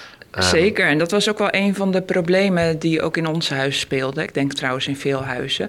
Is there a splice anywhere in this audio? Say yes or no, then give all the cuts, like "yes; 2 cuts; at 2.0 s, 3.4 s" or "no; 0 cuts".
no; 0 cuts